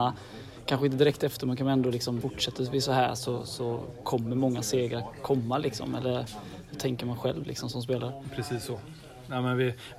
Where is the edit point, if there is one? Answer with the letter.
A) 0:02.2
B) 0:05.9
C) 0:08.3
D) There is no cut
A